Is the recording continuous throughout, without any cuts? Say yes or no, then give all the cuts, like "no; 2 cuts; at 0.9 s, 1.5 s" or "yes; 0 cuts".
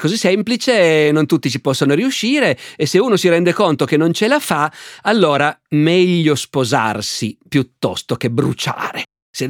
yes; 0 cuts